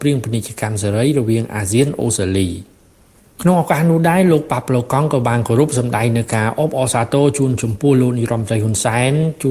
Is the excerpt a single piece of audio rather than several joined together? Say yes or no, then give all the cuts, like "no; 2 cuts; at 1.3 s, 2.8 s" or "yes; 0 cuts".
yes; 0 cuts